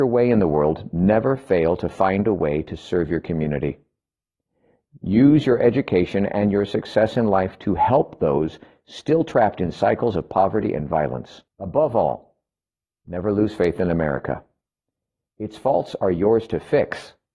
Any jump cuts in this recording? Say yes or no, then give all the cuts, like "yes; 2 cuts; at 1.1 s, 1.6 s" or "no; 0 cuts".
yes; 1 cut; at 11.5 s